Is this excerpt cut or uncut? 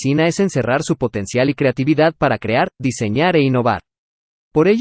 uncut